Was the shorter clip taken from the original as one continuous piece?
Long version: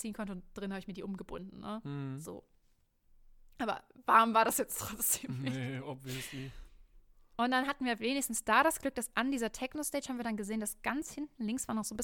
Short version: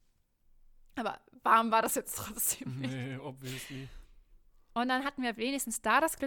yes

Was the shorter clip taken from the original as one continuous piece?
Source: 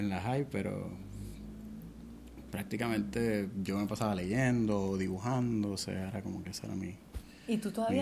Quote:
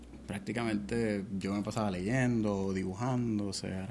yes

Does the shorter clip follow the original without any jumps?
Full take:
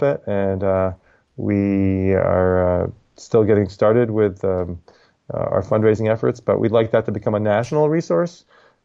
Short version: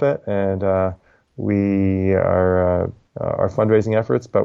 no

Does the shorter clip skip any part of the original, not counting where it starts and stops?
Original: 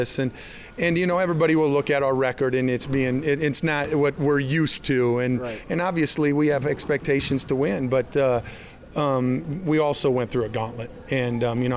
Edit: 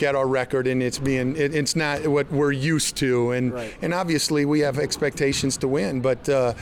no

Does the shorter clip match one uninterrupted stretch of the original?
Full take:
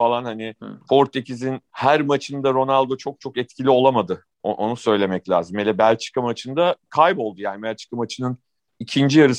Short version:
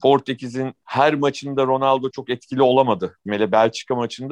no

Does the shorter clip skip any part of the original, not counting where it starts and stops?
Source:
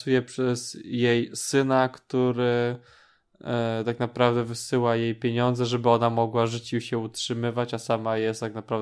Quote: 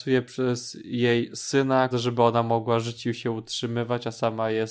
yes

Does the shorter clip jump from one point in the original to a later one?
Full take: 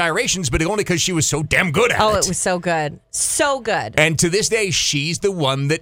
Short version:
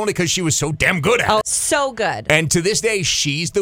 yes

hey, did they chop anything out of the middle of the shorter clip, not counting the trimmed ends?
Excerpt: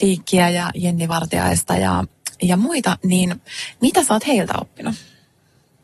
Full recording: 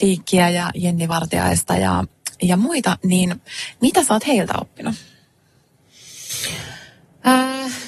no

